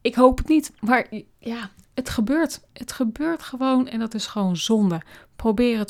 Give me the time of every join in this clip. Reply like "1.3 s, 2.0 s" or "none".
none